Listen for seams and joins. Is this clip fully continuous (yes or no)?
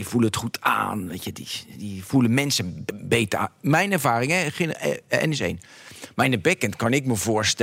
yes